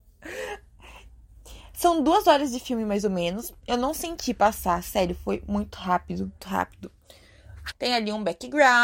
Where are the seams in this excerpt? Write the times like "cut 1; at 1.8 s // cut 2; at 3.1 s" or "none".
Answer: cut 1; at 6.4 s // cut 2; at 7.7 s